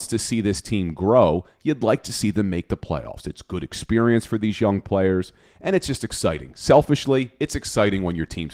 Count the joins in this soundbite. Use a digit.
0